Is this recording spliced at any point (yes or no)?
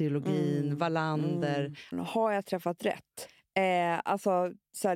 yes